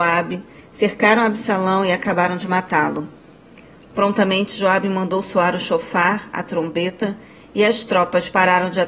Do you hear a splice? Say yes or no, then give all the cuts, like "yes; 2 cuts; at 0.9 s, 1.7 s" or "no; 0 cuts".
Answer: no; 0 cuts